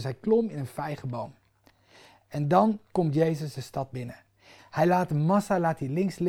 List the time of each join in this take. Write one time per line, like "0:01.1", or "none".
0:04.6